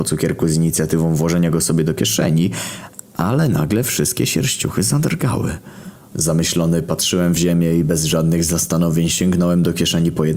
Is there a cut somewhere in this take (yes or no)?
yes